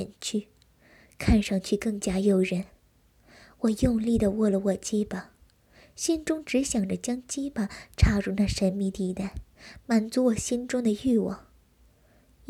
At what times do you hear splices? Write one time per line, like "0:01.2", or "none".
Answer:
none